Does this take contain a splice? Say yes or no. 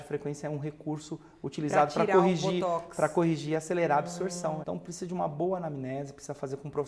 yes